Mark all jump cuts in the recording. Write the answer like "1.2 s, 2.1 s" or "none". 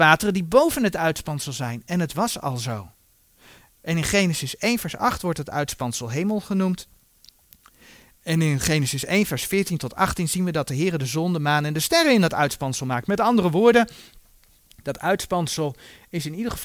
none